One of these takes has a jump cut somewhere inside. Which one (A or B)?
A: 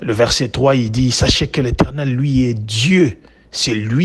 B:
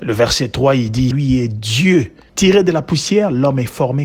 B